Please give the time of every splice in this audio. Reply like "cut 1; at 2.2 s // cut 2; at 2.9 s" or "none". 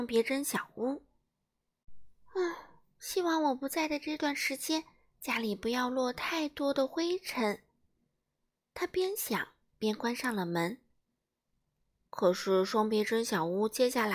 none

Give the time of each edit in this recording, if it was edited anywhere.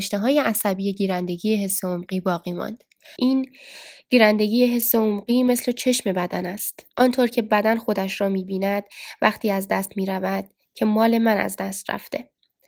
cut 1; at 3.2 s // cut 2; at 6.9 s

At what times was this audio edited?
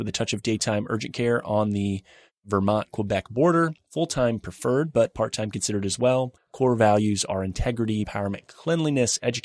cut 1; at 3.8 s // cut 2; at 6.4 s // cut 3; at 8.0 s

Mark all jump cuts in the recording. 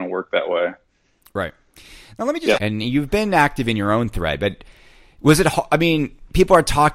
cut 1; at 2.6 s

